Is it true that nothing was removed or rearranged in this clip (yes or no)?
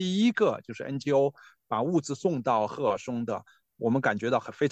yes